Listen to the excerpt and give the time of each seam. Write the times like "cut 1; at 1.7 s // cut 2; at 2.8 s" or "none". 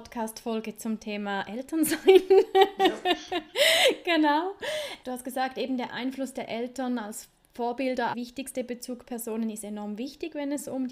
cut 1; at 5.0 s // cut 2; at 8.1 s